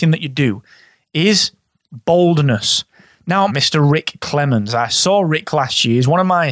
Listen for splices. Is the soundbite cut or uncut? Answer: cut